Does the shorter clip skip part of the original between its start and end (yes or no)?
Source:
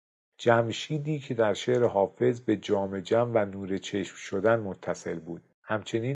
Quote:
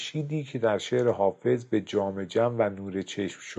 no